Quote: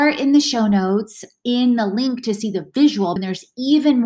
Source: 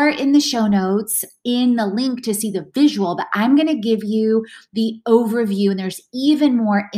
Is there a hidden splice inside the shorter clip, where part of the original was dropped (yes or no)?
yes